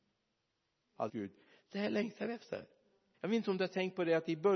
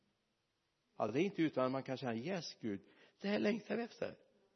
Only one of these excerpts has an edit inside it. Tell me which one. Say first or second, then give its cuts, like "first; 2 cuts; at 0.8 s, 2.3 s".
first; 2 cuts; at 1.1 s, 3.1 s